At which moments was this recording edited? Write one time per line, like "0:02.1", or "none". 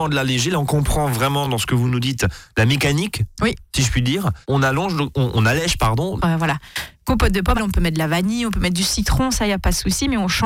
0:04.4
0:06.2
0:07.6